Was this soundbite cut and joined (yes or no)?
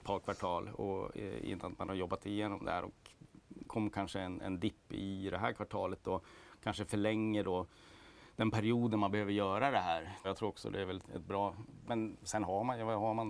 yes